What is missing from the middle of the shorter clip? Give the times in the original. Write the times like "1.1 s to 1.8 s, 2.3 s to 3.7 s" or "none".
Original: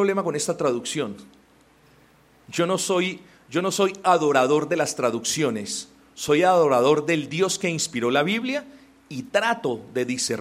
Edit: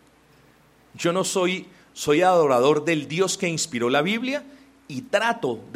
3.4 s to 6.1 s